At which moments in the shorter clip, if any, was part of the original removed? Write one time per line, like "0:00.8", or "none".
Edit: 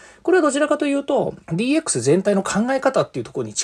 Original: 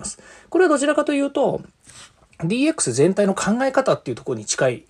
0:01.4